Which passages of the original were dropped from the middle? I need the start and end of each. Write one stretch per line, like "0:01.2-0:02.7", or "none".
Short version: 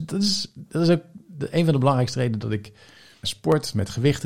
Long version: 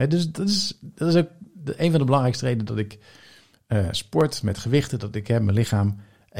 0:03.5-0:03.9